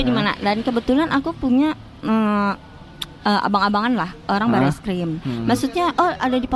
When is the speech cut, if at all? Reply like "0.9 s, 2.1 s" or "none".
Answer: 5.2 s